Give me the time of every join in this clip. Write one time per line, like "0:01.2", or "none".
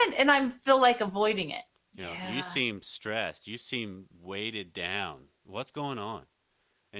0:01.8
0:04.1